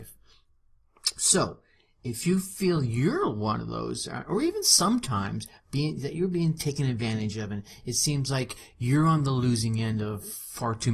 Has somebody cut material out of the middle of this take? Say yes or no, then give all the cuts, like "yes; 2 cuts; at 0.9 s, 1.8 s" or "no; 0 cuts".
no; 0 cuts